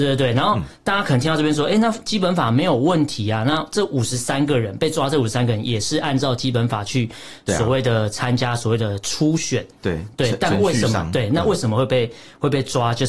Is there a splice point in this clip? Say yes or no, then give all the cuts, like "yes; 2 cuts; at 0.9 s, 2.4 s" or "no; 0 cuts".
no; 0 cuts